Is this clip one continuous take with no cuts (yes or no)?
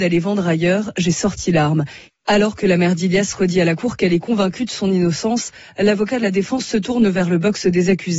no